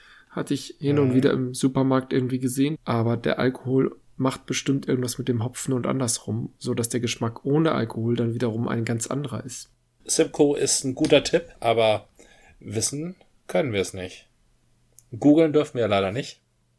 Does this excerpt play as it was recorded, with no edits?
no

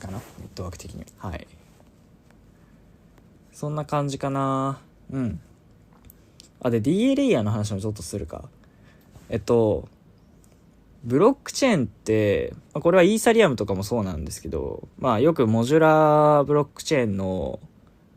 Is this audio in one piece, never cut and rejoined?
no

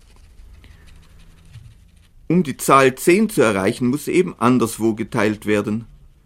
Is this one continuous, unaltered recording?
no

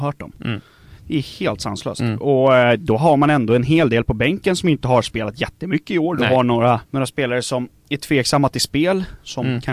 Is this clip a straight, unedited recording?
no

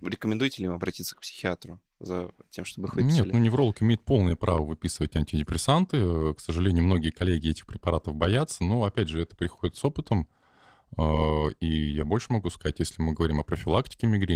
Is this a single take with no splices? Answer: yes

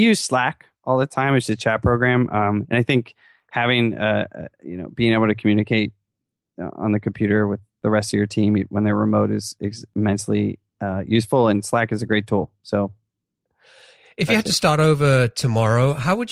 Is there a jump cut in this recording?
no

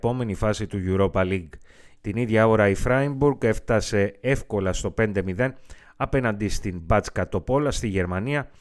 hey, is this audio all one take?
no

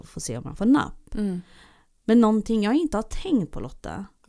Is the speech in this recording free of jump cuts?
yes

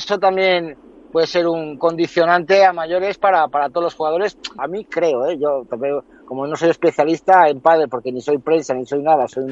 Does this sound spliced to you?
yes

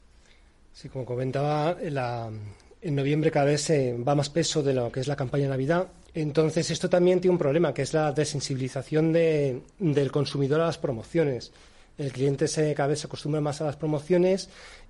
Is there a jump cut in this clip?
yes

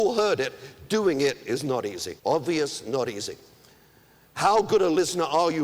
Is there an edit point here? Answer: yes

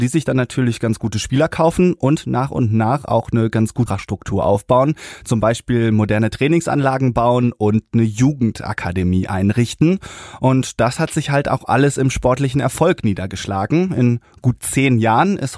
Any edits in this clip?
yes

